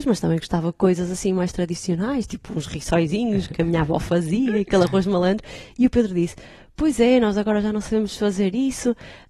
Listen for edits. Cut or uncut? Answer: uncut